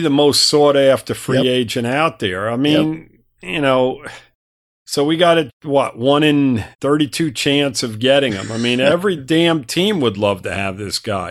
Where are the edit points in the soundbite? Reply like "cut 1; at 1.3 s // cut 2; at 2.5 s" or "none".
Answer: cut 1; at 6.7 s